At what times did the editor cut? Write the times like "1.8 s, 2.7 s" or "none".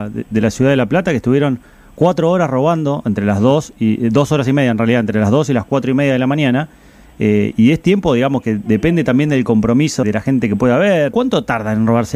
7.5 s, 10.0 s, 11.1 s